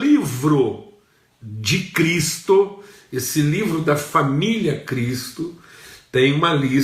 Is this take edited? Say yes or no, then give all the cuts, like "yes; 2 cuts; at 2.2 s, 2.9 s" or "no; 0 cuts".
no; 0 cuts